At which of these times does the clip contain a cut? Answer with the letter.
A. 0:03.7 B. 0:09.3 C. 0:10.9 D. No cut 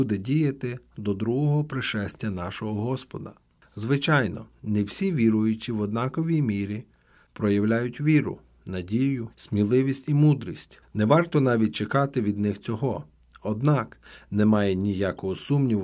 B